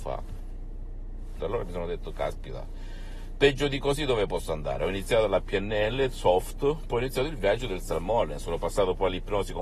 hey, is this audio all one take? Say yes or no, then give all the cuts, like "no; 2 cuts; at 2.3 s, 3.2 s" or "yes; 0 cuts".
no; 1 cut; at 1.4 s